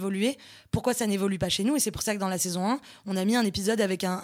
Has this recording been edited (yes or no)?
no